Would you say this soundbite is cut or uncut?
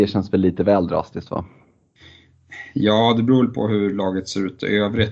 uncut